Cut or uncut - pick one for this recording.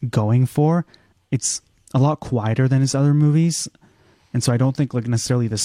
uncut